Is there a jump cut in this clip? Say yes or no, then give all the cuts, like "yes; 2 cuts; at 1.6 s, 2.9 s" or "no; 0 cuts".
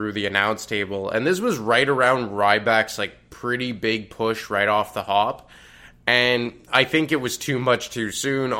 no; 0 cuts